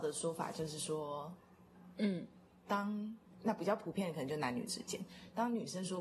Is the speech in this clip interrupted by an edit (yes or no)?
yes